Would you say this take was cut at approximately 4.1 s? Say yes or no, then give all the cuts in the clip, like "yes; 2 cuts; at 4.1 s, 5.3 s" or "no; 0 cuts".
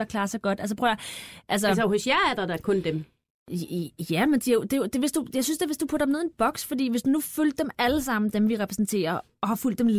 no; 0 cuts